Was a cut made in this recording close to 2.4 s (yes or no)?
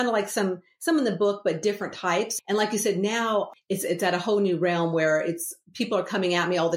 yes